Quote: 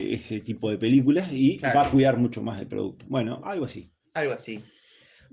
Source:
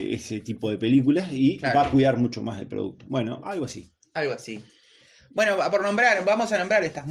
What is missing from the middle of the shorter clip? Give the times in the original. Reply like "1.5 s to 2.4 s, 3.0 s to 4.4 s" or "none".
none